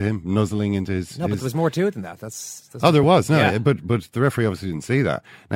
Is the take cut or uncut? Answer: uncut